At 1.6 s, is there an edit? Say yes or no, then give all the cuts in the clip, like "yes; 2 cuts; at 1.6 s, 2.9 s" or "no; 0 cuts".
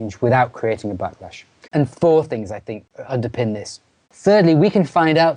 yes; 2 cuts; at 1.6 s, 4.0 s